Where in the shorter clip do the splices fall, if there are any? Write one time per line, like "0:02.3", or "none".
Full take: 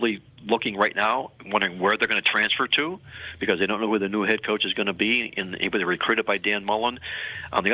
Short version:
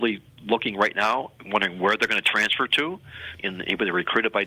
0:03.4